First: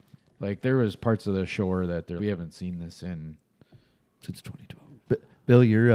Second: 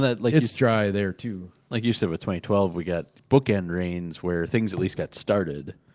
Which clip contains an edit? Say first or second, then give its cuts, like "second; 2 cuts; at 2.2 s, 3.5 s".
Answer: first; 2 cuts; at 2.2 s, 5.0 s